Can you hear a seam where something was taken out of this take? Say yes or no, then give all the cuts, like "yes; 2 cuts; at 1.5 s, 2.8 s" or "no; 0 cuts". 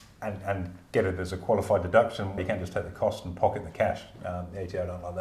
yes; 1 cut; at 2.4 s